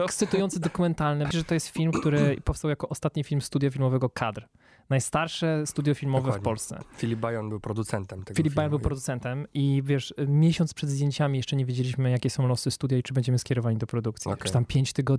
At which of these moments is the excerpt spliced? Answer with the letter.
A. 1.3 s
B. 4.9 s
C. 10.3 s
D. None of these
A